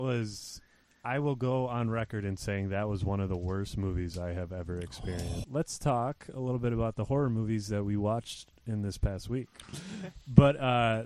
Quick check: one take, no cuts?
no; 2 cuts; at 5.4 s, 9.6 s

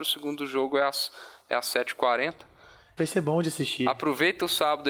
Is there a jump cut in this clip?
yes; 1 cut; at 3.0 s

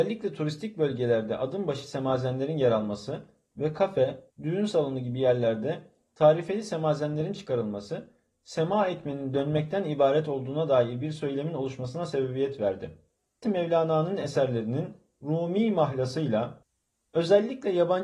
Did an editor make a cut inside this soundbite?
yes; 2 cuts; at 4.3 s, 13.4 s

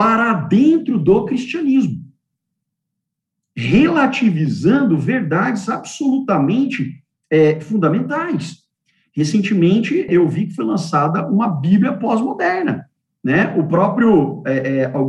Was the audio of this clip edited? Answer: yes; 1 cut; at 10.1 s

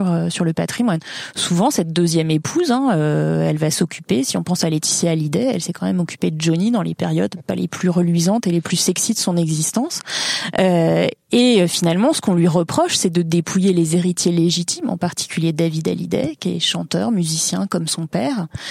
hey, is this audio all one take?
yes; 0 cuts

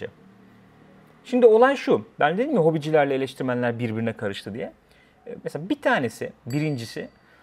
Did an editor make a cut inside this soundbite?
yes; 1 cut; at 5.4 s

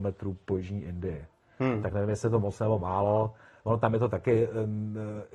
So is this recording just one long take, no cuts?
yes; 0 cuts

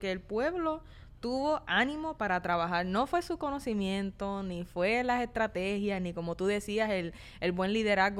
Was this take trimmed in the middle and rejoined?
no; 0 cuts

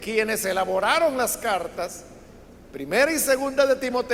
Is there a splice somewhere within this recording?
no; 0 cuts

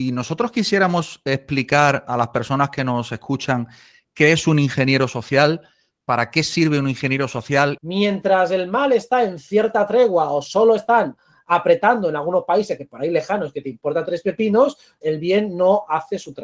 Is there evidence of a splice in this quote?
yes; 2 cuts; at 7.8 s, 15.0 s

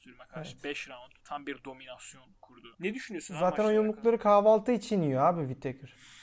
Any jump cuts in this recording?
no; 0 cuts

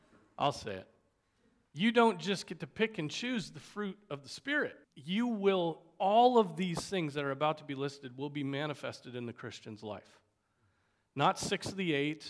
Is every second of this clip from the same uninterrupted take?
no; 2 cuts; at 1.7 s, 4.8 s

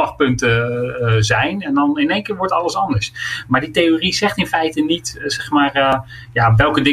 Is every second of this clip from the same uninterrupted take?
yes; 0 cuts

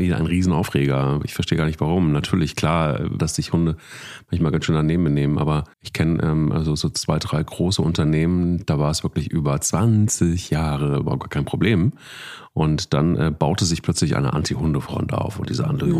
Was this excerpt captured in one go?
no; 2 cuts; at 3.2 s, 5.7 s

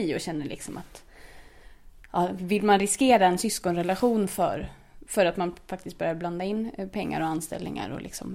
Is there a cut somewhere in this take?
no; 0 cuts

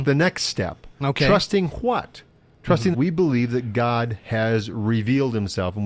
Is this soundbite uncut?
no; 1 cut; at 2.9 s

